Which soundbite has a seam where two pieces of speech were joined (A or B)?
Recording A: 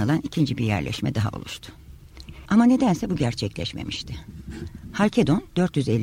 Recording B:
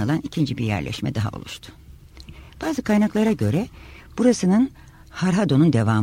A